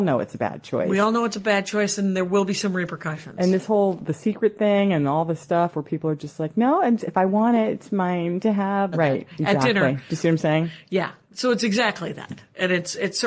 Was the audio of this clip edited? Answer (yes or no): yes